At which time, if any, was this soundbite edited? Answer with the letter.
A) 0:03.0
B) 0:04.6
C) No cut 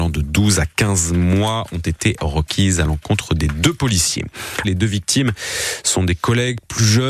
B